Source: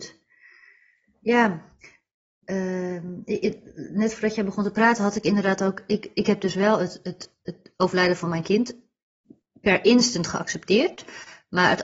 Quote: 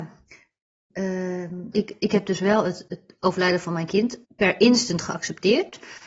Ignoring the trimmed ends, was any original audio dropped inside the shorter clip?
yes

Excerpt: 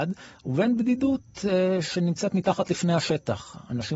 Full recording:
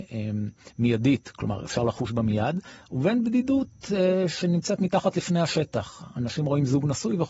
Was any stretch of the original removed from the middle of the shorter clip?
no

